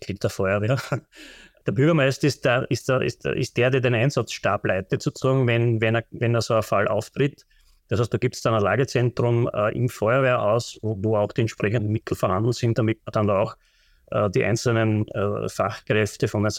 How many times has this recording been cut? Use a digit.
0